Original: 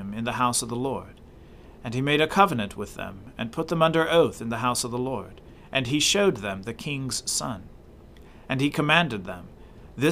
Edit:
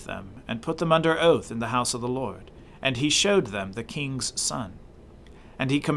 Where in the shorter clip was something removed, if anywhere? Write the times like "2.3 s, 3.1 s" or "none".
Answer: none